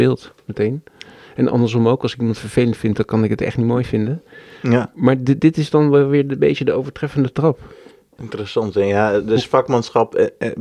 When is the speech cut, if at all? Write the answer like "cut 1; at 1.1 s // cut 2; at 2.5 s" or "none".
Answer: none